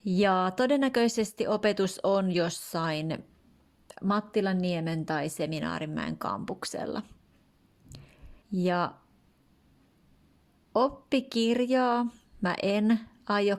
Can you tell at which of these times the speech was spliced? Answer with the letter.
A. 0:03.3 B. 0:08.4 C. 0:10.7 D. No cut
B